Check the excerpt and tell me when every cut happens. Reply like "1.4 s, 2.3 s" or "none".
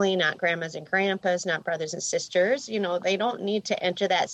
none